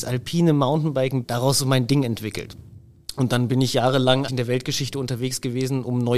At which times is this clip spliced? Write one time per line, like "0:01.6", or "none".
0:01.2
0:04.3